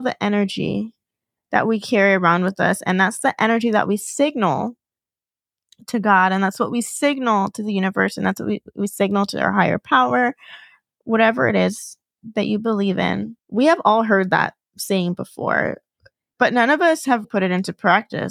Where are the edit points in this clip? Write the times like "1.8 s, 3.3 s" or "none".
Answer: 13.4 s, 17.2 s